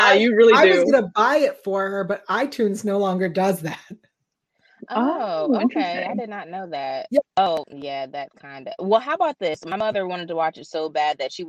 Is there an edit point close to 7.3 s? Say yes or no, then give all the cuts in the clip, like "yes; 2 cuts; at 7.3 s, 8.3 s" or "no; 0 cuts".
yes; 1 cut; at 7.3 s